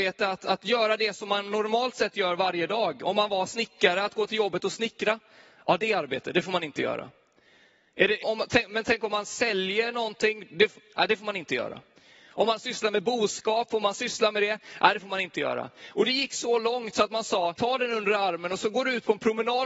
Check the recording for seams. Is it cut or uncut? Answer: cut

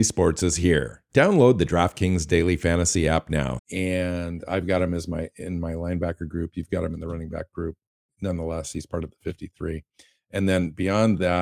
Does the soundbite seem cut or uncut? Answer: cut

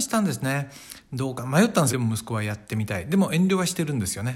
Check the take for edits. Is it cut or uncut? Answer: cut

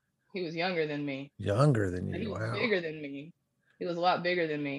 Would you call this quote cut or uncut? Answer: uncut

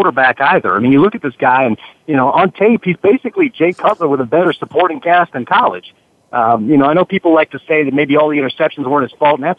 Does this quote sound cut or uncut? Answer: uncut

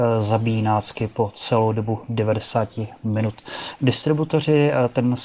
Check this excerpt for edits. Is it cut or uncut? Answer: uncut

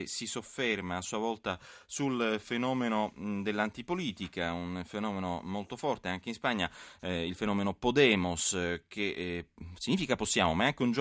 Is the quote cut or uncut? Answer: uncut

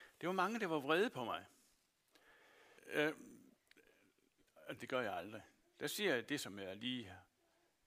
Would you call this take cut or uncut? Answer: cut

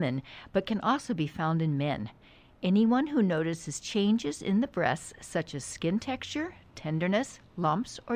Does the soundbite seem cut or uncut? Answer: uncut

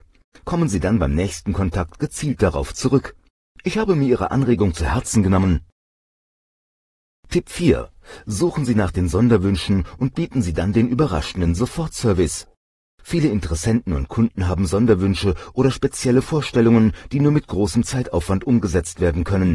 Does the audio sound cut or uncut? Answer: uncut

